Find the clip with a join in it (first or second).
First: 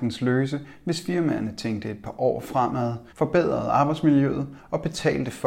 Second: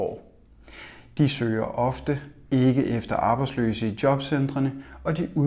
first